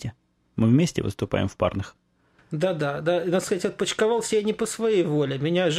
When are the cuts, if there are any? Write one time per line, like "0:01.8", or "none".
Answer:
none

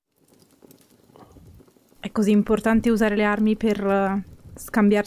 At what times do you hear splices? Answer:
0:02.0

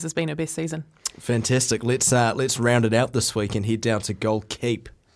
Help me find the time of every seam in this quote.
none

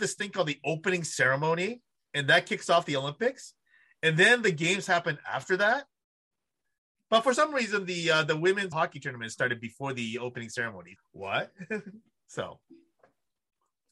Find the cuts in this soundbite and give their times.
0:08.7
0:11.0

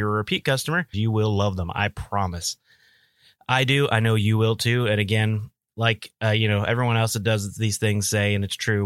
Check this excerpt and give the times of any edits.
0:00.9

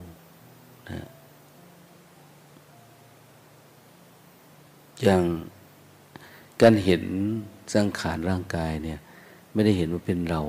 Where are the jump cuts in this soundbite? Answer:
none

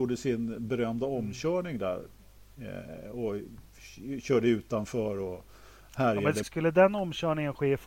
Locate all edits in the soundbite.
0:06.4

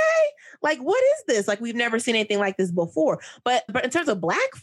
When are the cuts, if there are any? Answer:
0:03.7

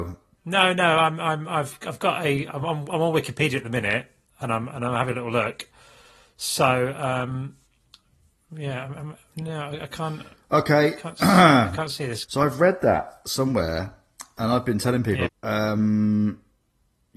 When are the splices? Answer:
0:12.3
0:15.3

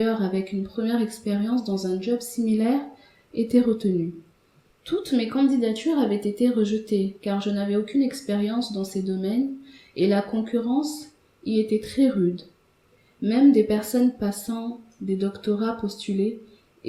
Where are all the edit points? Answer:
0:04.7

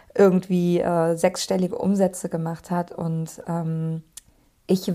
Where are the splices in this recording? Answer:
none

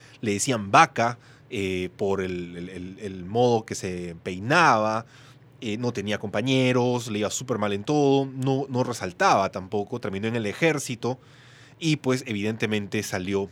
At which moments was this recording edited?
none

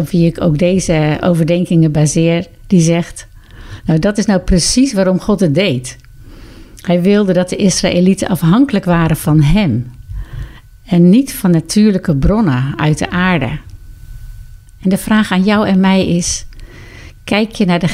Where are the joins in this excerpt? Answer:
none

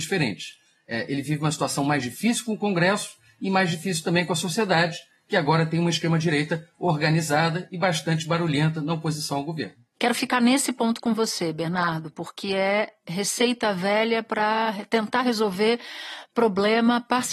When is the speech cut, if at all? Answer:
none

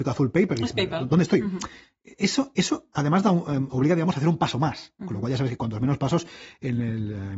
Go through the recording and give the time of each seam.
0:03.7

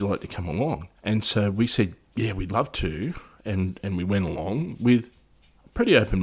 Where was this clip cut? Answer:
0:01.0

